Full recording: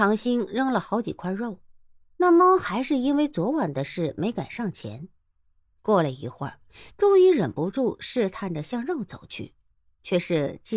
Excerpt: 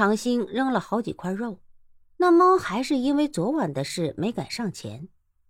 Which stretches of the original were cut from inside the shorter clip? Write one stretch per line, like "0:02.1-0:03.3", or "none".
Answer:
none